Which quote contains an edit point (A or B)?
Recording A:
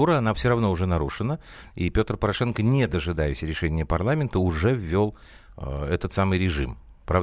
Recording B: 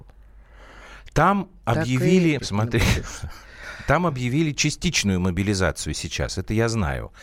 B